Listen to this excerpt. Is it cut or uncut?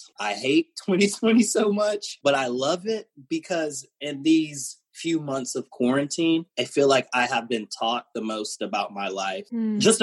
cut